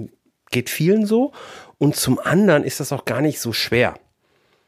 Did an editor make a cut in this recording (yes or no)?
no